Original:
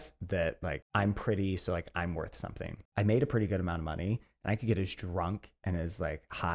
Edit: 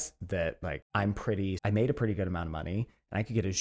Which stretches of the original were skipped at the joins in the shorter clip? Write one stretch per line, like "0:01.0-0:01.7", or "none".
0:01.6-0:02.9